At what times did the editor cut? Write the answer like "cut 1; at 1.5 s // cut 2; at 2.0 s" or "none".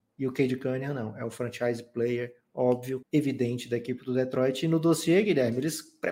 cut 1; at 3.0 s